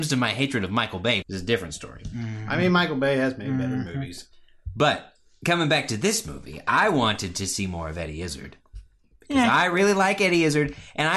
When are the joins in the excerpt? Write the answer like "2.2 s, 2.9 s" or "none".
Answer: 1.2 s